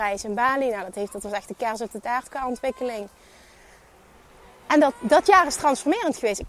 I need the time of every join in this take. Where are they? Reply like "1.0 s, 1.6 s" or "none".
none